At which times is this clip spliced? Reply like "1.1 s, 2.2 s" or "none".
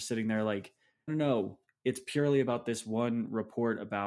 1.1 s

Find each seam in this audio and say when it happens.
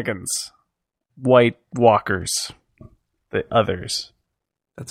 1.1 s

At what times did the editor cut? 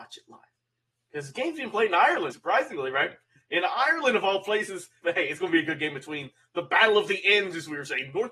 2.3 s, 5.0 s

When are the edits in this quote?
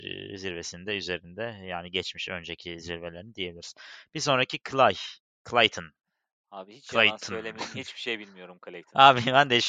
none

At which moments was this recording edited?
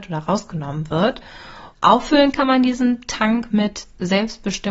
1.7 s

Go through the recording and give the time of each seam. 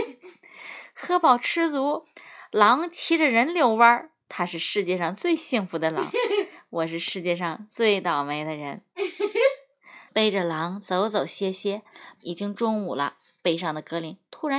10.1 s, 12.2 s

